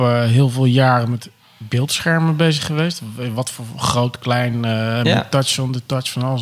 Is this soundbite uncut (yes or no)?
yes